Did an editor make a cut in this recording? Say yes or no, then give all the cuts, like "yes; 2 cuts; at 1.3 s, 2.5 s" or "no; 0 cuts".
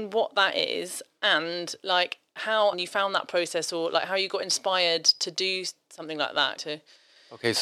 yes; 2 cuts; at 2.7 s, 6.6 s